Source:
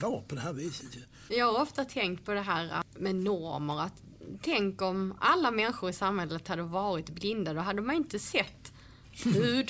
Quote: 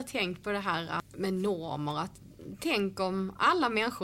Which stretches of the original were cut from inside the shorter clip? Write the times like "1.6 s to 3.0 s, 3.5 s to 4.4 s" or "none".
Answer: none